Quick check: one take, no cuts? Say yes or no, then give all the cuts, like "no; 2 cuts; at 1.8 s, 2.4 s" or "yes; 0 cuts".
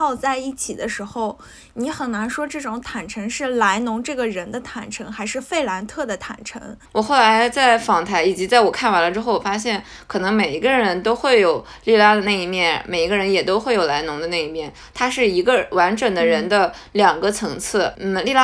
no; 1 cut; at 6.8 s